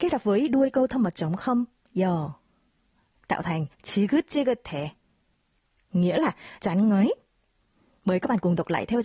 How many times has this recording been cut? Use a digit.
1